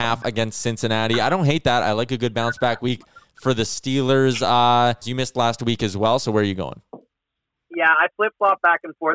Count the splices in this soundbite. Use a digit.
1